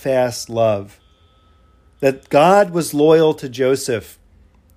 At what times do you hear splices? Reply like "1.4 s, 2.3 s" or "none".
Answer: none